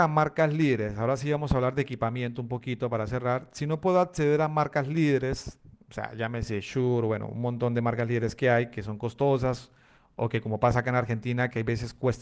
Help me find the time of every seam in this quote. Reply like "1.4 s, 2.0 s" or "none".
none

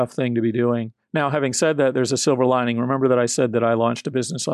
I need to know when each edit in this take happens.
1.0 s

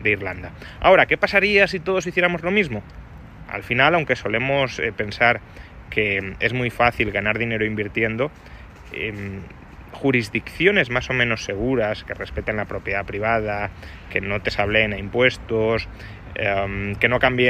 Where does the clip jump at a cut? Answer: 3.5 s

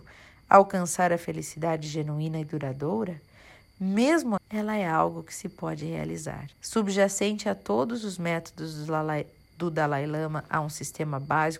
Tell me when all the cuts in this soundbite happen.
4.4 s, 6.5 s

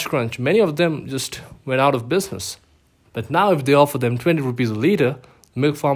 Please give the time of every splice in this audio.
3.0 s

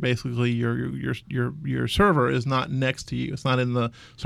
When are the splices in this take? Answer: none

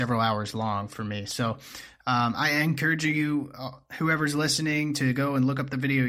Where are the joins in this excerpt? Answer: none

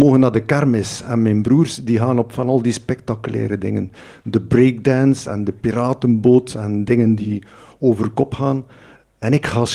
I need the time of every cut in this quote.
none

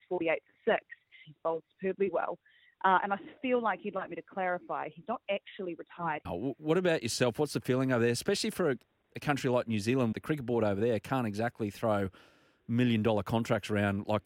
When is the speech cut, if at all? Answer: 1.2 s, 6.2 s, 10.1 s

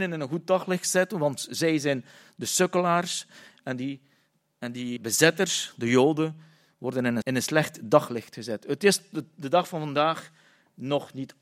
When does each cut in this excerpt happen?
5.0 s, 7.2 s

